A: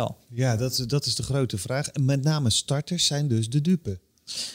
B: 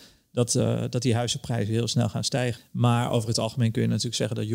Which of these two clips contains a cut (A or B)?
B